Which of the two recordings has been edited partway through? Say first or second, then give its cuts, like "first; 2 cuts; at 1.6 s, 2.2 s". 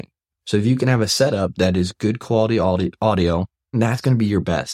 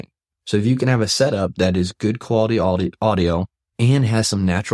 first; 1 cut; at 3.7 s